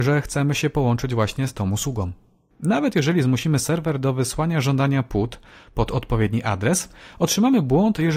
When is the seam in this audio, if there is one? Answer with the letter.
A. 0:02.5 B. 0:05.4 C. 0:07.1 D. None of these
A